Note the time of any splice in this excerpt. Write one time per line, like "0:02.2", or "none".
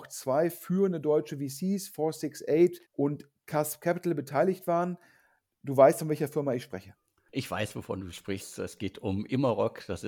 0:02.8